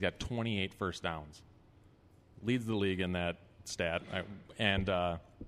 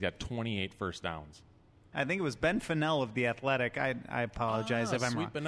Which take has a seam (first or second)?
second